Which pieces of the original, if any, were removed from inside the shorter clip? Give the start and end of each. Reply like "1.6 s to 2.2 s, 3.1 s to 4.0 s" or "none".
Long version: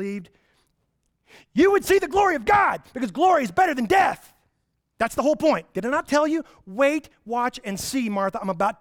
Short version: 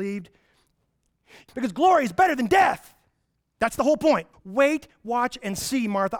1.5 s to 2.9 s, 5.7 s to 6.5 s

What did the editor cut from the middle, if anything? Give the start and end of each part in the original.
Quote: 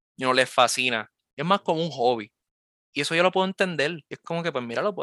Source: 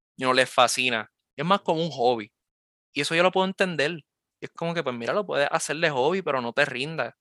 4.1 s to 4.4 s

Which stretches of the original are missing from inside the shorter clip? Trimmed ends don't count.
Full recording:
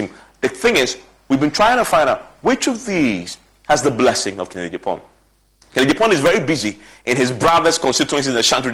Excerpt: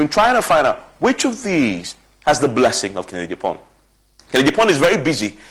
none

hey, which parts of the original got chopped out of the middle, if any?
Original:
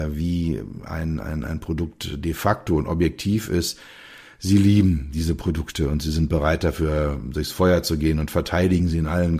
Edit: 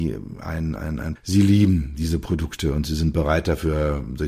1.6 s to 4.3 s

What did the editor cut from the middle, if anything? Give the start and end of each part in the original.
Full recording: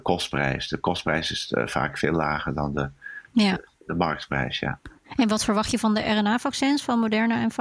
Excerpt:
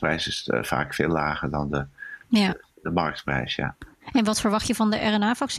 none

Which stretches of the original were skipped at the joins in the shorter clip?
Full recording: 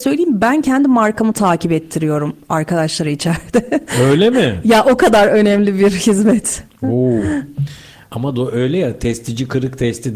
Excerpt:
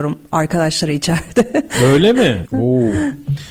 4.6 s to 6.7 s

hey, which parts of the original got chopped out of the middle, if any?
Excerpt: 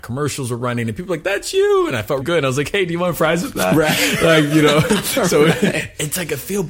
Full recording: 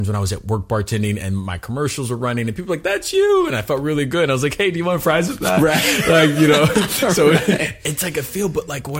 3.8 s to 4.1 s

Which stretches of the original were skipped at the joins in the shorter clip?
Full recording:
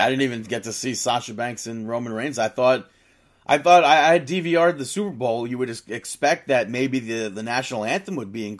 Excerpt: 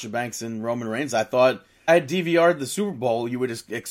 3.1 s to 4.1 s

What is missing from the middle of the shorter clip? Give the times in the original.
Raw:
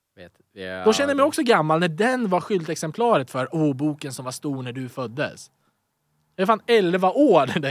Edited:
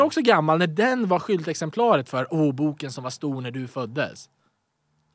none

